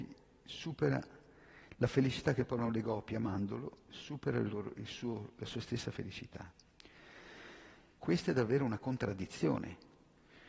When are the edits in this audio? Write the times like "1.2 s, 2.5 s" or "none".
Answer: 8.0 s